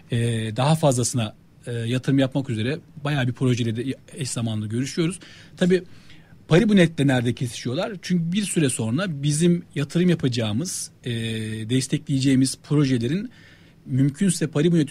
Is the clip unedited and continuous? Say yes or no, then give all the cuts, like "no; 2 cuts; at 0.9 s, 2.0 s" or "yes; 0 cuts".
yes; 0 cuts